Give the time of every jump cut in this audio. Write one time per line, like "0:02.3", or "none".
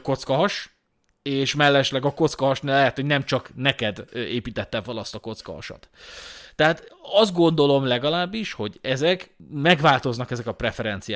none